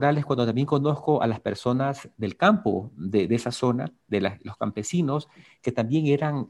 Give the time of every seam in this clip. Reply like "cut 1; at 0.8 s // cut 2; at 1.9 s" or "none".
none